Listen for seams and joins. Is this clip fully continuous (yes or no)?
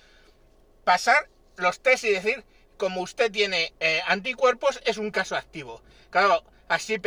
yes